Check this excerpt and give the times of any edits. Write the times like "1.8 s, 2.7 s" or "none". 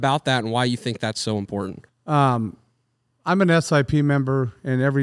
1.9 s

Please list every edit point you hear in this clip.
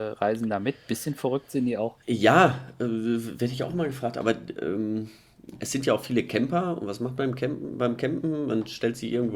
2.0 s

